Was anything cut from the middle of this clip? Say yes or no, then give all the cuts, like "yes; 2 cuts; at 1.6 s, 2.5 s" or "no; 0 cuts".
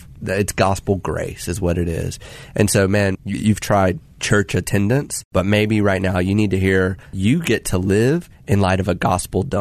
yes; 1 cut; at 3.2 s